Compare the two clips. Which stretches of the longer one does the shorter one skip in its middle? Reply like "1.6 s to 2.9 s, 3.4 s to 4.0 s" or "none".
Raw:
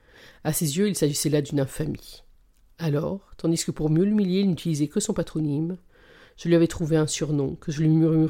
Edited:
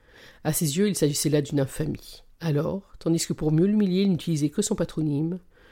2.3 s to 2.7 s